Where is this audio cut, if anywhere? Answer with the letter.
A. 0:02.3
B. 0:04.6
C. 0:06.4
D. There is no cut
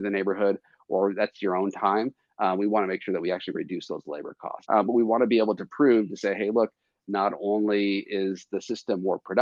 B